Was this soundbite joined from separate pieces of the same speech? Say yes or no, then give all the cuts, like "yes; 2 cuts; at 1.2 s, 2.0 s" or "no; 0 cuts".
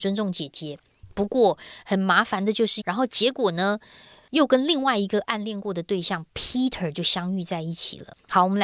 yes; 1 cut; at 2.8 s